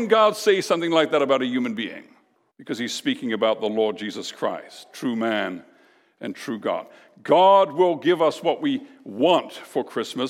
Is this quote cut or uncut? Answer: cut